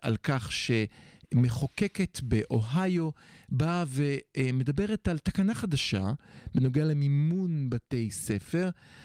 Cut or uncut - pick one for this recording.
uncut